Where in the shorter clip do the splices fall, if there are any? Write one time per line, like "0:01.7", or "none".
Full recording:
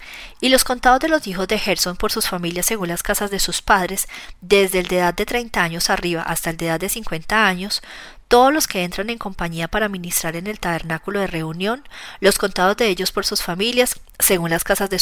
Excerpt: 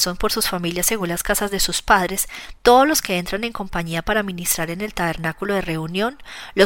0:02.6